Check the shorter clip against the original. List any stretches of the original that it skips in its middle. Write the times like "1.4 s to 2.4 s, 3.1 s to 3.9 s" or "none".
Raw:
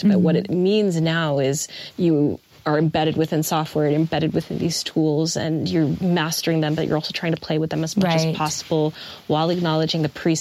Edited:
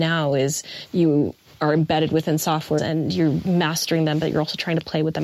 3.8 s to 5.3 s